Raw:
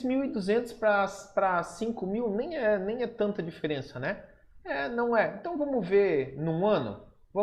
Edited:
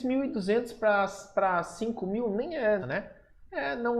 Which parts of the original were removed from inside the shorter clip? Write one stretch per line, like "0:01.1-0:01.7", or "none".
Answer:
0:02.8-0:03.9